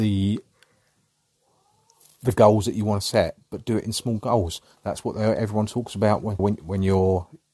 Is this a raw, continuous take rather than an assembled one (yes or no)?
no